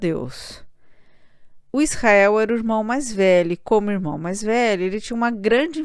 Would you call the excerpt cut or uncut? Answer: cut